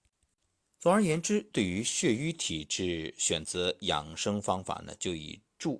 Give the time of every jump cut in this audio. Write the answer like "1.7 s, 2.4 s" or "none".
none